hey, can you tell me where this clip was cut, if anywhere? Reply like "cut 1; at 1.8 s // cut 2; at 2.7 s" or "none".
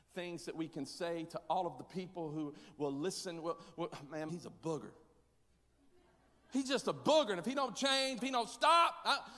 cut 1; at 4.3 s // cut 2; at 8.2 s